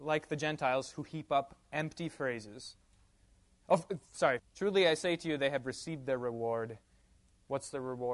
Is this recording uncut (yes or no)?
no